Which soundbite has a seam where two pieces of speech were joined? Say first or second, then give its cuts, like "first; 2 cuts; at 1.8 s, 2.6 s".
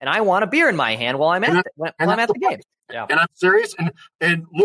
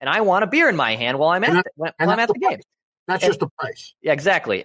first; 1 cut; at 2.8 s